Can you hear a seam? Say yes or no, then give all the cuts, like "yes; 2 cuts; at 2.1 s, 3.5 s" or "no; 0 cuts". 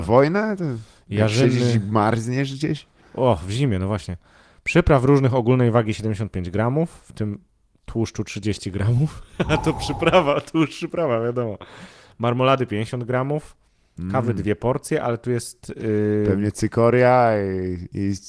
no; 0 cuts